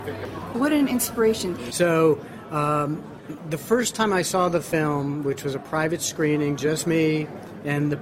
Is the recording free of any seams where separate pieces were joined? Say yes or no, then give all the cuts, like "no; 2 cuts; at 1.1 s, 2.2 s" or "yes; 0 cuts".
no; 1 cut; at 1.7 s